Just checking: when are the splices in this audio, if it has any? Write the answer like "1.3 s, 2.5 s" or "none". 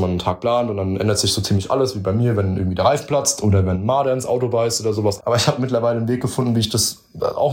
5.2 s